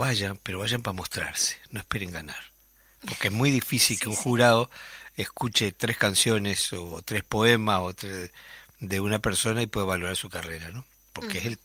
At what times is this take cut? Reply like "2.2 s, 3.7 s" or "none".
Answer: none